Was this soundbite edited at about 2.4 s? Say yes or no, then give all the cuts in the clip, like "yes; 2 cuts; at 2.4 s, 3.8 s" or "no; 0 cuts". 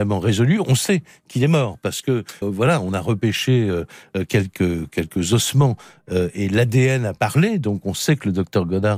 yes; 1 cut; at 2.4 s